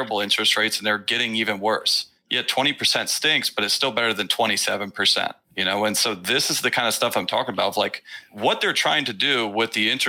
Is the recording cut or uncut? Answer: uncut